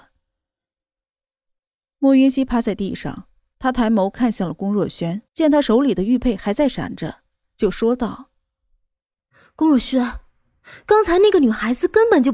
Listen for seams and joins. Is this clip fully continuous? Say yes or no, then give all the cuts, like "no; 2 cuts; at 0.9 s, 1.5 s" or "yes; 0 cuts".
no; 2 cuts; at 3.5 s, 5.3 s